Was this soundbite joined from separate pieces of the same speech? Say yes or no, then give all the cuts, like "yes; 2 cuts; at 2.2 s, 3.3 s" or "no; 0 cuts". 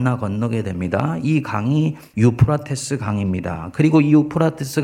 no; 0 cuts